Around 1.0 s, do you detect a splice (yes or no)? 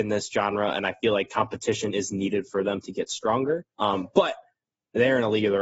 no